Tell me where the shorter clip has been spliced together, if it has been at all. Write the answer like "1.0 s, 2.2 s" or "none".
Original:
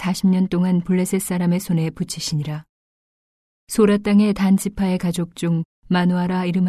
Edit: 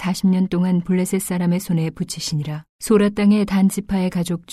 2.7 s

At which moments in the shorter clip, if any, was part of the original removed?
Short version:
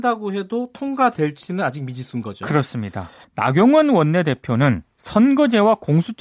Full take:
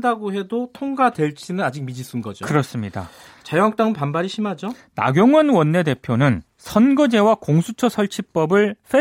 3.2 s

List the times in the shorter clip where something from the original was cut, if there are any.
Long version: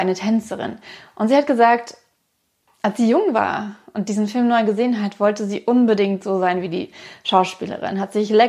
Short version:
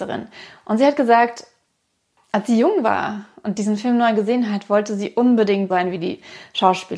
5.7 s

